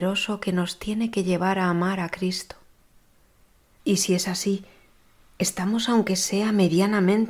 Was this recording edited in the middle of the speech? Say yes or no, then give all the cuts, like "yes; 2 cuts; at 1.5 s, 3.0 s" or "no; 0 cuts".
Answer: yes; 1 cut; at 3.8 s